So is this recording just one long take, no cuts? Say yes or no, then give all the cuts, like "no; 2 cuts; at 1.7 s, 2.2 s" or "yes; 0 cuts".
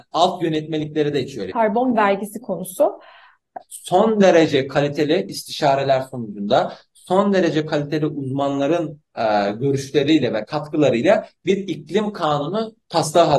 no; 2 cuts; at 1.5 s, 3.6 s